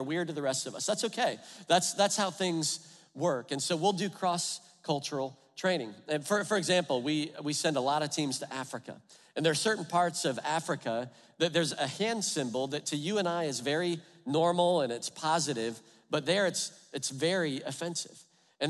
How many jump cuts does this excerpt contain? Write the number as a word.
zero